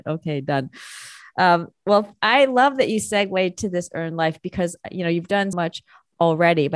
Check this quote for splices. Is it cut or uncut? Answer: cut